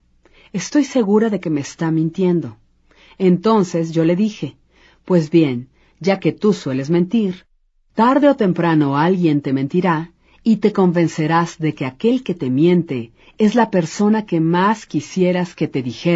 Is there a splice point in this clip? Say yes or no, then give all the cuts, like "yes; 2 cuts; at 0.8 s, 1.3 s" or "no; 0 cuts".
no; 0 cuts